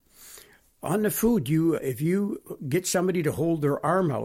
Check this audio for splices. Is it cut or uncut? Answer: cut